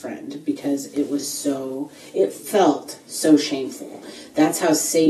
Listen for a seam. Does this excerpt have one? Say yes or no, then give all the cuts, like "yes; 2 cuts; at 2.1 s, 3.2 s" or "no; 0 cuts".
no; 0 cuts